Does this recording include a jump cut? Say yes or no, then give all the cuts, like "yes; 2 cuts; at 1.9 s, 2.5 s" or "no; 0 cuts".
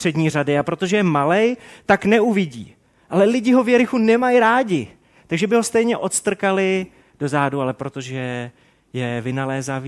no; 0 cuts